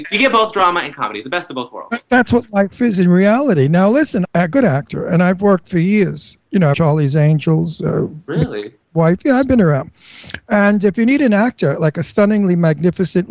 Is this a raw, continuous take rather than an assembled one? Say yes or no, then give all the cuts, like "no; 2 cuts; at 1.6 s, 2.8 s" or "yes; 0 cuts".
no; 2 cuts; at 4.2 s, 6.7 s